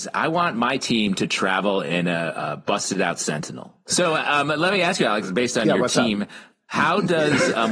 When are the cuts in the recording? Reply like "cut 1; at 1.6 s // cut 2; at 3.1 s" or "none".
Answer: cut 1; at 3.9 s